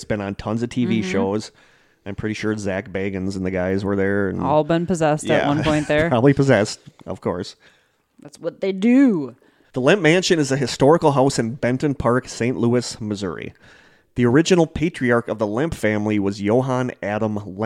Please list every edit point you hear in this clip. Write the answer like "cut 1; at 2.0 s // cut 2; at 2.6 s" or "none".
none